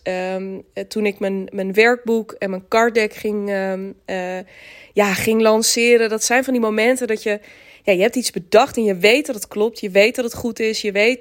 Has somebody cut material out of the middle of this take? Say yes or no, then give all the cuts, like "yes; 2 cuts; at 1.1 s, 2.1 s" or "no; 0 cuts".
no; 0 cuts